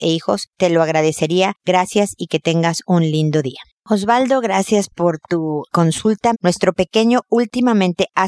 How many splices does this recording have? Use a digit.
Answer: 1